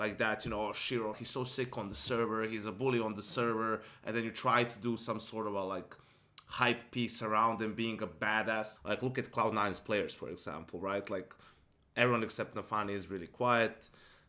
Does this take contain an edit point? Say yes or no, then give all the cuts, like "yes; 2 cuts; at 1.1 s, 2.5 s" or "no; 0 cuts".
yes; 2 cuts; at 1.1 s, 8.8 s